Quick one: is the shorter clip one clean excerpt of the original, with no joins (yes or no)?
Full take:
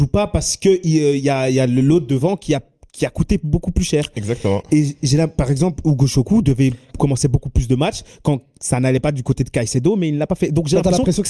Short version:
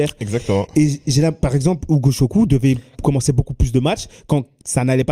yes